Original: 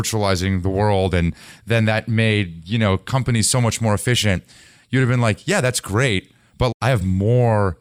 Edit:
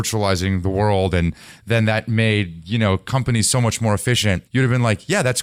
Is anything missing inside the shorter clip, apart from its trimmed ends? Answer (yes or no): yes